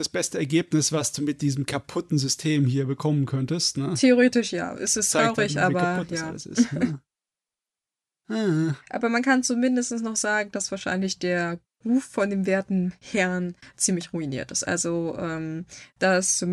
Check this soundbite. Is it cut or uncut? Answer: cut